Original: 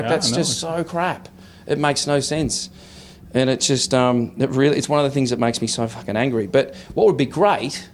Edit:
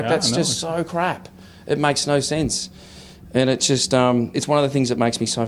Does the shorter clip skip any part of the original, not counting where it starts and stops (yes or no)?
yes